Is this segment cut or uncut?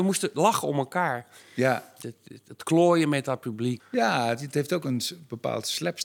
cut